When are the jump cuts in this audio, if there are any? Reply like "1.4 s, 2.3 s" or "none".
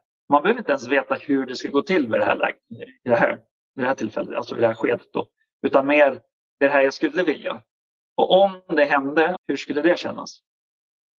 9.4 s

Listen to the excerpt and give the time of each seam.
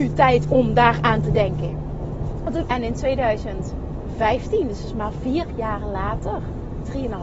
2.7 s

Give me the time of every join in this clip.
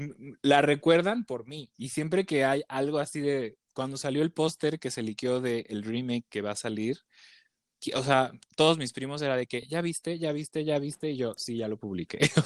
none

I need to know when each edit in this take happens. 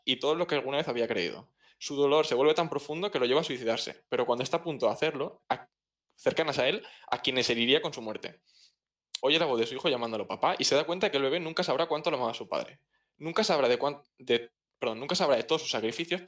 5.4 s, 9.2 s

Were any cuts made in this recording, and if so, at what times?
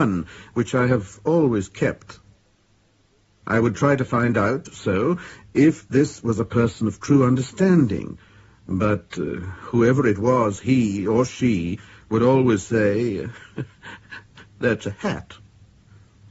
none

